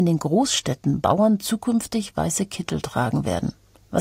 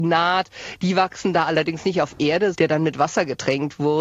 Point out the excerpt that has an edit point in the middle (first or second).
second